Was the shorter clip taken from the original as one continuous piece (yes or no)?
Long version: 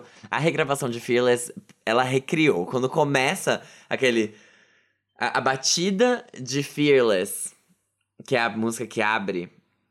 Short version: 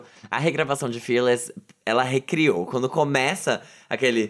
yes